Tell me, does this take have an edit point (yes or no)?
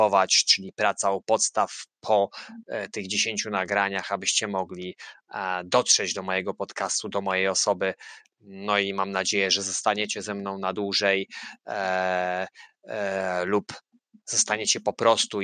no